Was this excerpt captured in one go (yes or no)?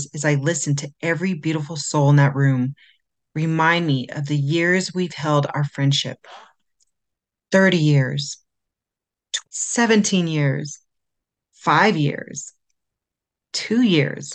no